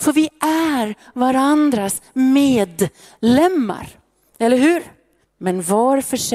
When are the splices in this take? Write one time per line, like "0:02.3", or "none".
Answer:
0:05.2